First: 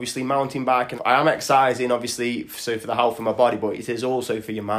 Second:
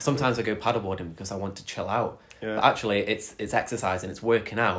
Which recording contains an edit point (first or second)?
first